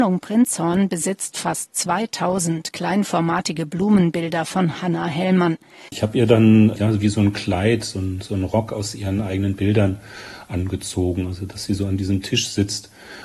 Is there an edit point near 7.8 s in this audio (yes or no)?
no